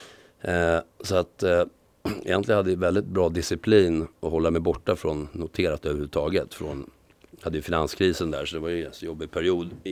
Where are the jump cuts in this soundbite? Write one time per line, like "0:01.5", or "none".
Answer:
none

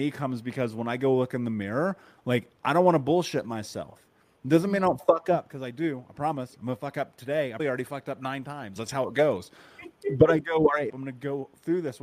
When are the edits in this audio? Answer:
0:07.6
0:08.8
0:10.9

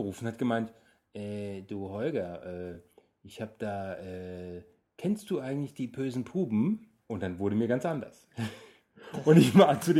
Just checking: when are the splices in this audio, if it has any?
none

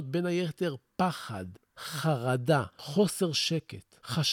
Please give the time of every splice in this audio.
0:02.7

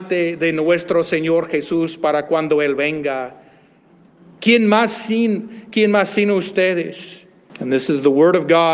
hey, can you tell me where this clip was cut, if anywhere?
0:07.5

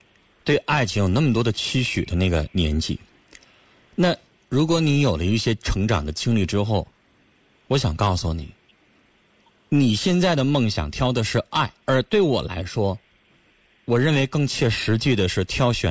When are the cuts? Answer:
0:11.8

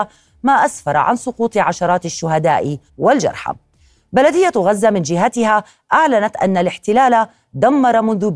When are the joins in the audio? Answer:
0:02.9

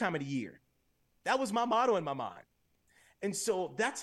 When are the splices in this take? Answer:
0:01.1

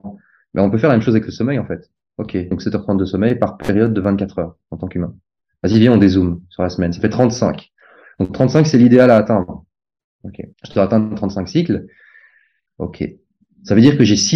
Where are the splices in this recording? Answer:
0:02.5
0:10.5
0:12.7

